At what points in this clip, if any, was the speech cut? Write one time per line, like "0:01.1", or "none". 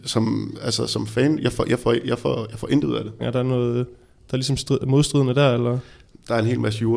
0:03.2